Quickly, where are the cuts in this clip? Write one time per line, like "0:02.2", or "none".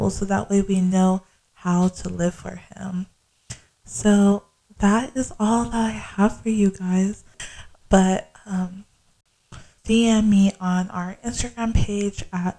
0:07.4
0:09.8